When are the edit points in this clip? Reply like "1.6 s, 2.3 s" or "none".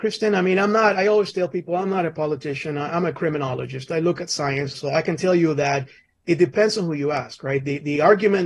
4.7 s